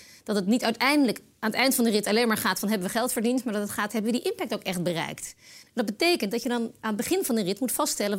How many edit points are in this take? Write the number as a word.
zero